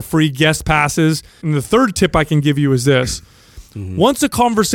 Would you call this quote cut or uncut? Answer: cut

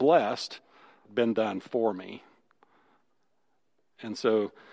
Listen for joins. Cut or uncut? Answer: cut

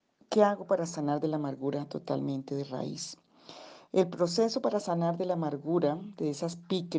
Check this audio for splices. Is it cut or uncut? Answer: uncut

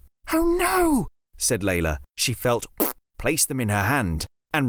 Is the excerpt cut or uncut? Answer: cut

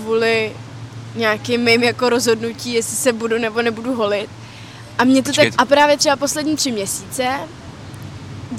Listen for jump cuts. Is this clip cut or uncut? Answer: cut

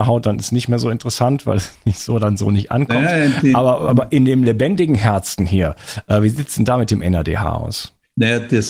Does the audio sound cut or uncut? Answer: uncut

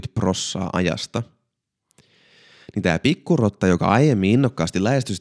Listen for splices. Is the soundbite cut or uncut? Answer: uncut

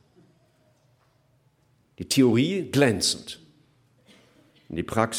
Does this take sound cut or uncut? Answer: uncut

